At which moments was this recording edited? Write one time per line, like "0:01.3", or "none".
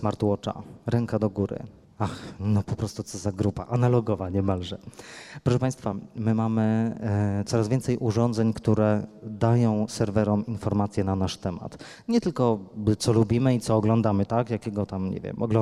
0:01.8
0:14.3